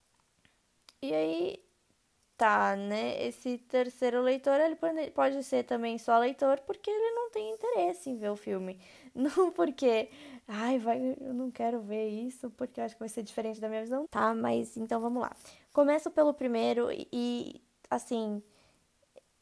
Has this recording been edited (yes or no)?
yes